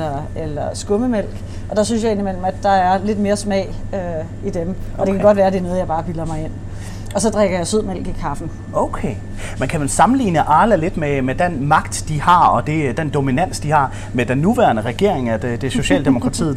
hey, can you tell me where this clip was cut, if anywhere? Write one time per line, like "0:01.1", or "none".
none